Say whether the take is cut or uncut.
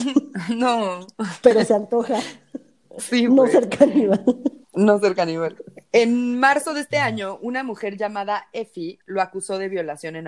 cut